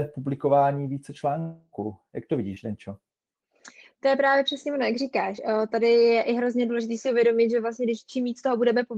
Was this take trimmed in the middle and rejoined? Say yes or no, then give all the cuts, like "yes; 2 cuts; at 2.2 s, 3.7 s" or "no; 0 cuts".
no; 0 cuts